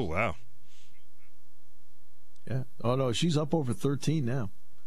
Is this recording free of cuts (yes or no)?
yes